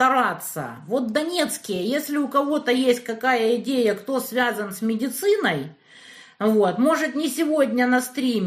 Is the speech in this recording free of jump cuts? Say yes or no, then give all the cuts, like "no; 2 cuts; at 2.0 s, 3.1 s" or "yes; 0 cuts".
yes; 0 cuts